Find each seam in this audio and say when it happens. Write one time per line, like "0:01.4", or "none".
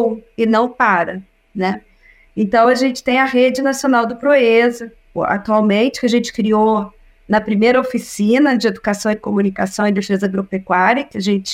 none